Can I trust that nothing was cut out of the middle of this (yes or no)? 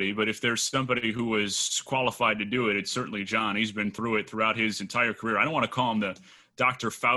yes